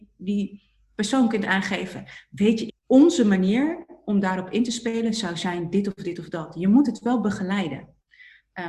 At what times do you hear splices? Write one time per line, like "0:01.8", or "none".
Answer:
0:02.7

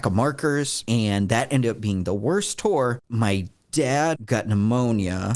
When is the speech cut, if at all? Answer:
0:04.1

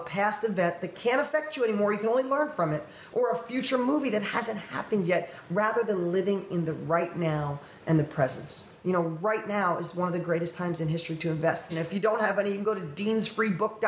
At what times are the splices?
0:11.7

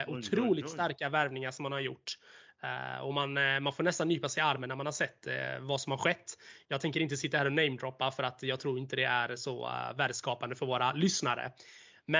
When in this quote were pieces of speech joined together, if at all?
none

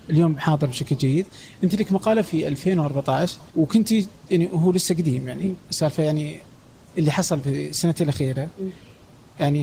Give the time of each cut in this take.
0:03.5

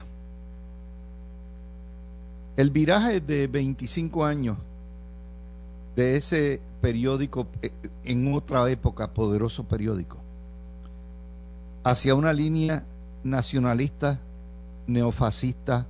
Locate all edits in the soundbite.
none

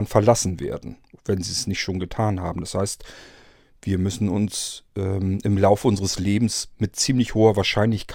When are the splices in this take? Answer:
none

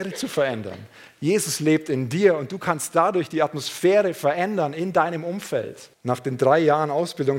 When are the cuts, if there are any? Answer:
0:05.9

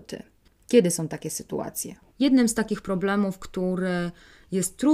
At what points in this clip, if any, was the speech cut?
0:02.1

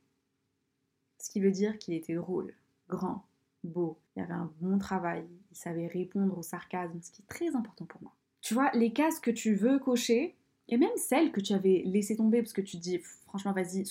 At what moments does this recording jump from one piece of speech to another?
0:04.1

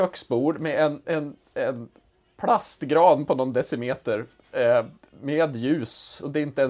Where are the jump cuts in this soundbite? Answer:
0:01.0

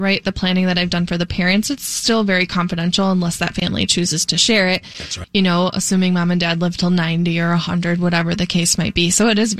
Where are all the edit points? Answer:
0:05.2

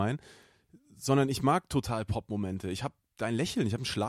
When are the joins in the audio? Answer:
none

